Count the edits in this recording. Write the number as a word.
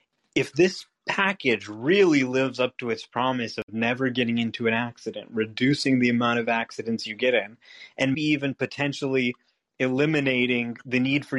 one